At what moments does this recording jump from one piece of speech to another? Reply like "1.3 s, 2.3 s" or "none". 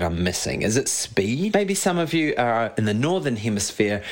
1.5 s